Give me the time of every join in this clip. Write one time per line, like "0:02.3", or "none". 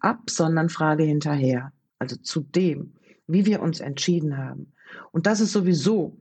0:01.9